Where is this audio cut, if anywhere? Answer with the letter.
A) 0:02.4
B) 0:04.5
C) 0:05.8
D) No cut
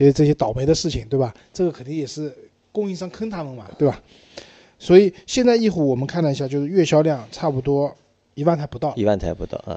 D